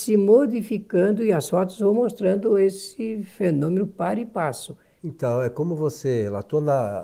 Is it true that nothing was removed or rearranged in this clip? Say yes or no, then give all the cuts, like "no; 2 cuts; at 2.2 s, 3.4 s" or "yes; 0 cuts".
no; 1 cut; at 5.0 s